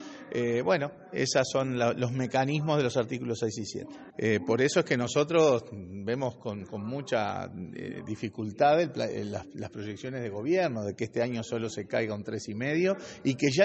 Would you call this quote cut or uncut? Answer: cut